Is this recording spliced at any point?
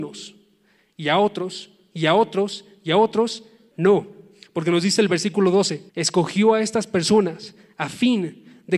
yes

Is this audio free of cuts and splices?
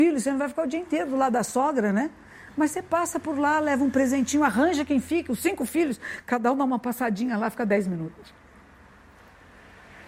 yes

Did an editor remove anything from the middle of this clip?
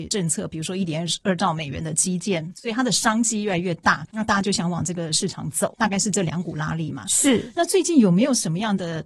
no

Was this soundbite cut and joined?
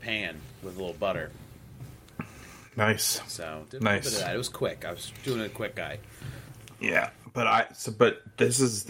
no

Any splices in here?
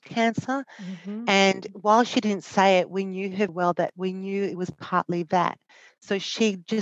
yes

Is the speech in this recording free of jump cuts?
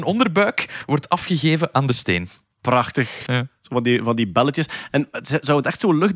no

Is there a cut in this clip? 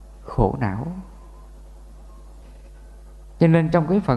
no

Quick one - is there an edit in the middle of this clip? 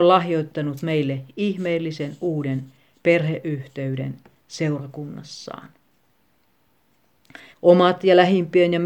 yes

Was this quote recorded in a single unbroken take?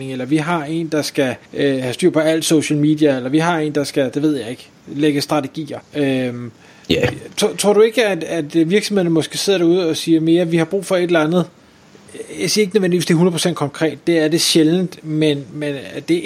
no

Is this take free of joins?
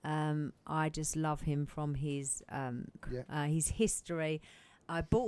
no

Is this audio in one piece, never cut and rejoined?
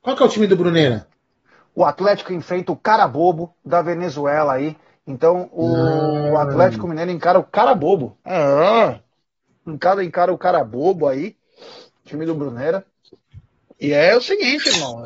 yes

